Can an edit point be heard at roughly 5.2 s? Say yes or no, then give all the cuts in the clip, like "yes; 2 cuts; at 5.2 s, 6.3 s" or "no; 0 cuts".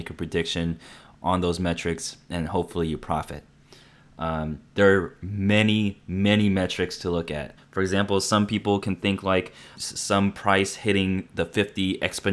no; 2 cuts; at 7.6 s, 9.8 s